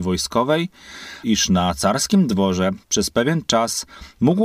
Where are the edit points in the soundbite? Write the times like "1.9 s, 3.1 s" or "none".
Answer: 1.2 s